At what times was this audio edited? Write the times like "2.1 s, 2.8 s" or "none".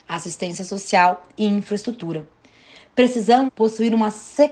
3.5 s